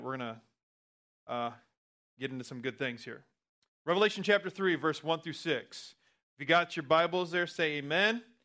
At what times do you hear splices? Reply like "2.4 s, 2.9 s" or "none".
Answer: none